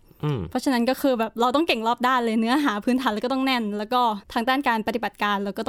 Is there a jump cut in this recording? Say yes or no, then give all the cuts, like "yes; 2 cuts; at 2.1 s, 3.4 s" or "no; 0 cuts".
yes; 1 cut; at 4.2 s